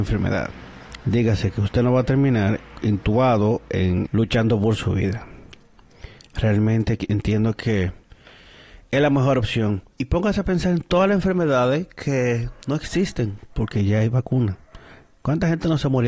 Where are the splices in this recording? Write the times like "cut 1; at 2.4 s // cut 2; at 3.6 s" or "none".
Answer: cut 1; at 4.1 s // cut 2; at 9.9 s

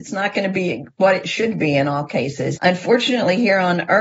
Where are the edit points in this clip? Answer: cut 1; at 2.6 s

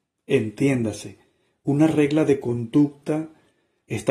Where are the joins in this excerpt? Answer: none

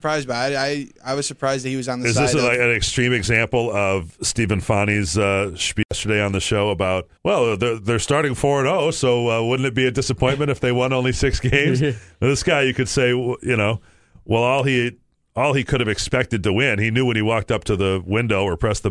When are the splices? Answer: cut 1; at 7.2 s

